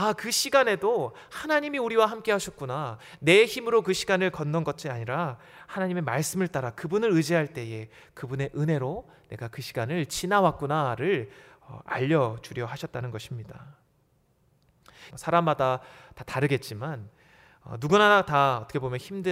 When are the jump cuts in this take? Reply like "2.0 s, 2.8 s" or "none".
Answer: 15.1 s